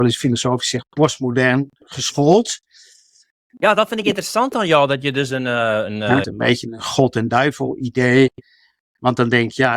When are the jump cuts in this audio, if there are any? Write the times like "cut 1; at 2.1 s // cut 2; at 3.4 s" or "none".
cut 1; at 1.8 s // cut 2; at 6.2 s

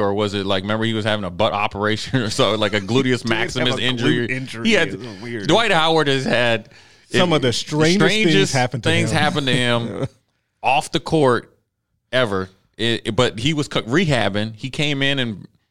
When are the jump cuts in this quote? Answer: none

